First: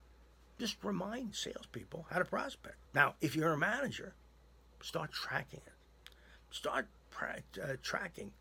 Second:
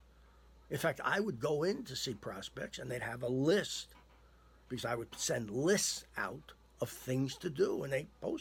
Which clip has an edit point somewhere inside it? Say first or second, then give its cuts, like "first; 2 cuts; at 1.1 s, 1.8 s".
first; 2 cuts; at 2.8 s, 6.4 s